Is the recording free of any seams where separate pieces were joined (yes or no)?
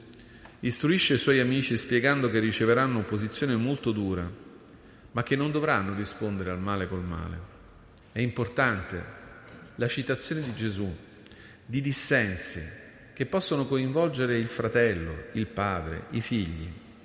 no